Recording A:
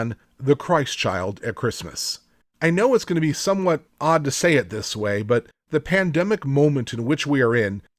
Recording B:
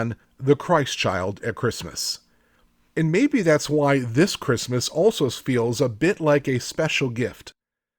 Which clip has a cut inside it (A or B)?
A